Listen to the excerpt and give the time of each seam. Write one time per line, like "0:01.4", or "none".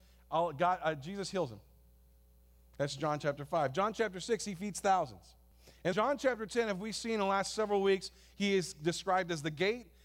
0:05.9